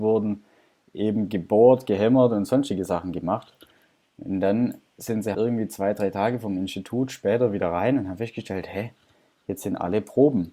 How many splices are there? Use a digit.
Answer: 1